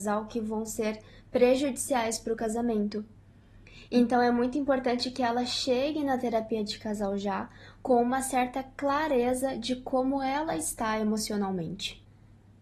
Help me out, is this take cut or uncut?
uncut